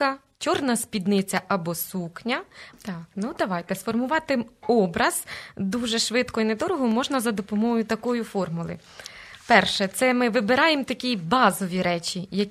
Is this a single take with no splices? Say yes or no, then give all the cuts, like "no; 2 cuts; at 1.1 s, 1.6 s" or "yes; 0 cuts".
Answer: no; 1 cut; at 2.7 s